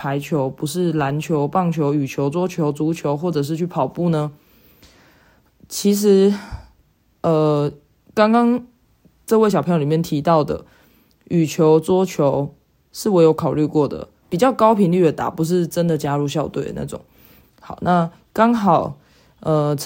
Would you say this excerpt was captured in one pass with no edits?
no; 2 cuts; at 14.2 s, 17.4 s

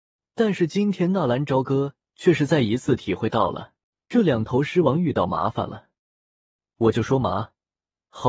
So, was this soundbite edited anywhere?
yes; 1 cut; at 3.9 s

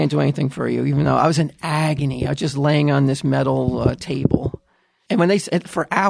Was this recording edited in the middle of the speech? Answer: yes; 1 cut; at 5.1 s

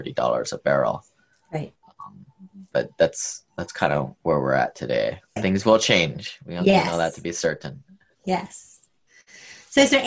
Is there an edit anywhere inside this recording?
yes; 1 cut; at 5.4 s

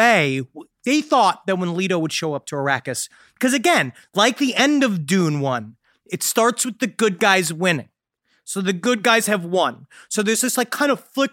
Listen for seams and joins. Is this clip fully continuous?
yes; 0 cuts

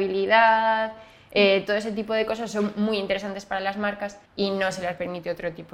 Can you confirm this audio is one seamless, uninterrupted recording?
no; 1 cut; at 4.3 s

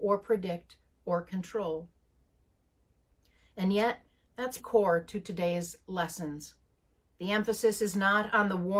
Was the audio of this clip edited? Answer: yes; 1 cut; at 4.6 s

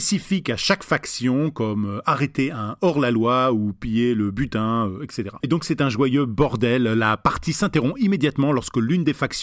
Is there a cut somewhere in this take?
no; 0 cuts

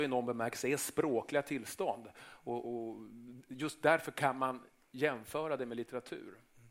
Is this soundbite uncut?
no; 1 cut; at 2.6 s

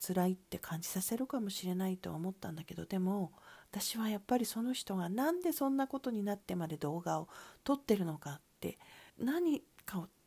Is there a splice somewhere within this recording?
yes; 1 cut; at 9.1 s

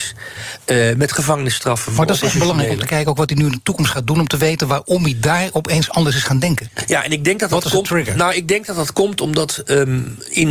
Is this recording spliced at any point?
no; 0 cuts

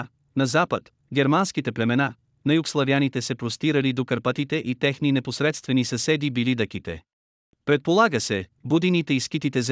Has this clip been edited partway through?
yes; 2 cuts; at 7.4 s, 8.6 s

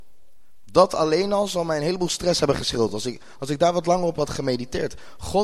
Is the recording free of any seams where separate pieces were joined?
yes; 0 cuts

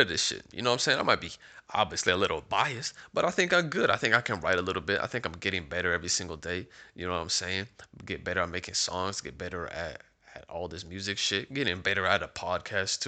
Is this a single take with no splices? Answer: yes; 0 cuts

